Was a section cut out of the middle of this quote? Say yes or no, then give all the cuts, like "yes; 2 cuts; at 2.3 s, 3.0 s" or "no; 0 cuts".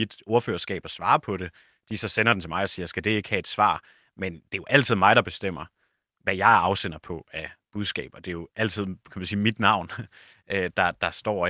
no; 0 cuts